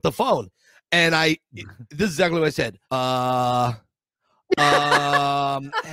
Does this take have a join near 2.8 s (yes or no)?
yes